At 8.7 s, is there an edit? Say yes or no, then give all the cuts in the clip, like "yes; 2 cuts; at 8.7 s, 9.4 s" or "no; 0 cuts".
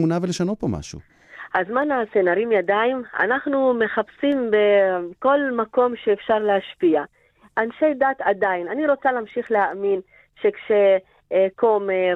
no; 0 cuts